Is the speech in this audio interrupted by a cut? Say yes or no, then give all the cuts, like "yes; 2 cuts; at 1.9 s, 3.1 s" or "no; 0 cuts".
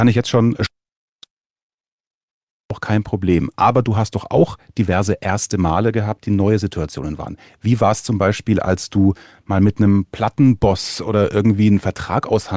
no; 0 cuts